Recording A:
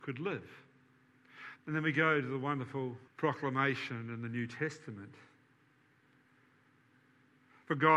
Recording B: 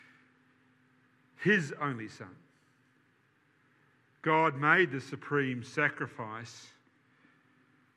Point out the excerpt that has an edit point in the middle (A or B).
A